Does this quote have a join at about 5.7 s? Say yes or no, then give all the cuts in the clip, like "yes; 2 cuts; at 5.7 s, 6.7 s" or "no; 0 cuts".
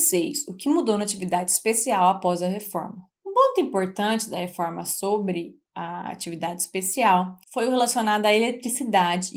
yes; 3 cuts; at 3.1 s, 5.7 s, 7.4 s